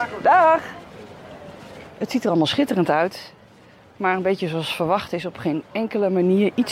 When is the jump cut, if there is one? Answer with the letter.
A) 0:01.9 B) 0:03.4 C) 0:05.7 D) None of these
D